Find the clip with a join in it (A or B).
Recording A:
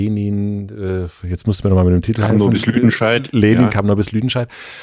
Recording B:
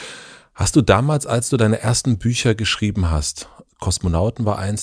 B